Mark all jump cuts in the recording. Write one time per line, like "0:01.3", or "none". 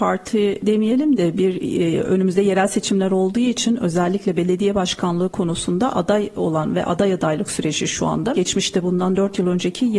0:08.3